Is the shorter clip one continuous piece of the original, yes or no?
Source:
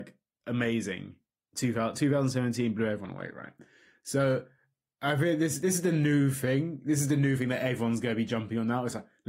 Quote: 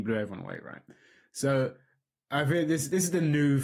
yes